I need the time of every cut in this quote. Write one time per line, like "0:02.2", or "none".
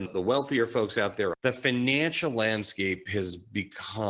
0:01.3

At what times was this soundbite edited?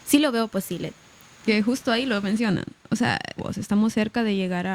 0:01.5
0:03.4

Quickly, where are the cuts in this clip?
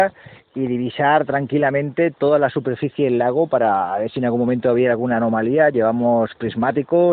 none

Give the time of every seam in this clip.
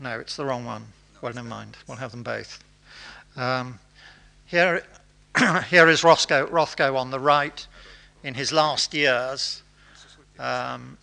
none

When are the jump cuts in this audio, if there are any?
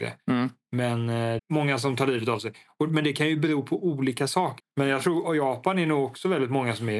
0:01.4
0:04.6

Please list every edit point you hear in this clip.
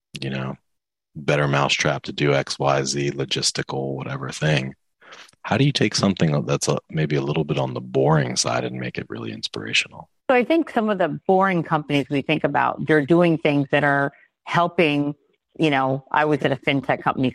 0:10.2
0:16.4

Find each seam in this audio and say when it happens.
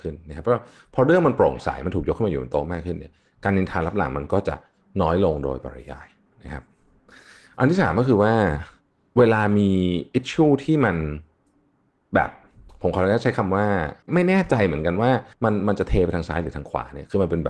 0:14.0
0:15.3

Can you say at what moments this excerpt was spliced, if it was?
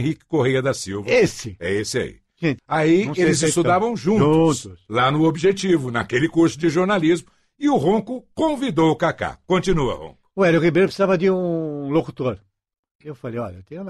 0:02.6

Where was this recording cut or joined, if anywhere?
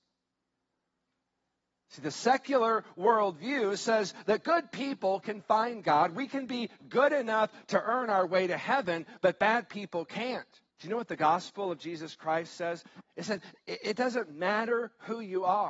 0:10.7
0:13.0

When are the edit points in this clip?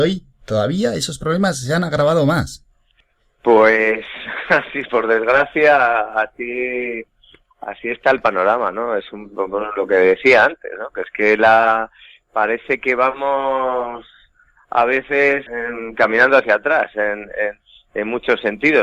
0:15.5

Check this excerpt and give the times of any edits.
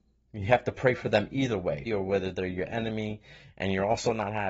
0:01.9

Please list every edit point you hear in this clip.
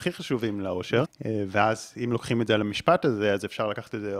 0:01.0

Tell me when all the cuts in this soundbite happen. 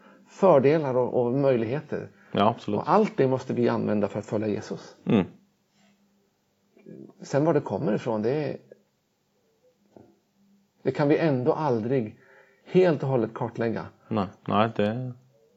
0:14.4

